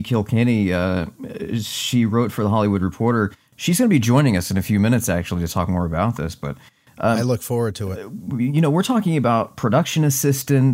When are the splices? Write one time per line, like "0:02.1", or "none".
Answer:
none